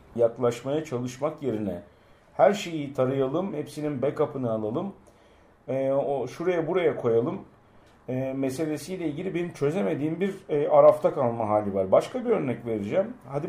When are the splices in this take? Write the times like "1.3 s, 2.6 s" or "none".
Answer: 3.5 s